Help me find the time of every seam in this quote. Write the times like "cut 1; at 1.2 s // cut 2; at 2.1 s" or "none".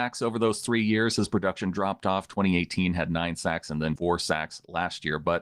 cut 1; at 4.0 s